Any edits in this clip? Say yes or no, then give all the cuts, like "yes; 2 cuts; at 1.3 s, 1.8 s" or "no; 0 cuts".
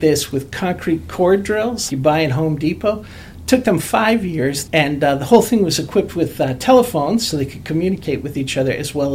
yes; 2 cuts; at 1.9 s, 4.7 s